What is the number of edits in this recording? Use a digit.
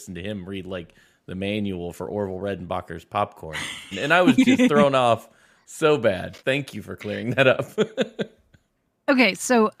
2